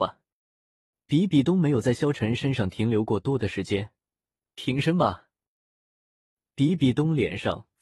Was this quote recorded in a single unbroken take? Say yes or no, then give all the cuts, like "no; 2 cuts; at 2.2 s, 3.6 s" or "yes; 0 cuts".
no; 1 cut; at 4.4 s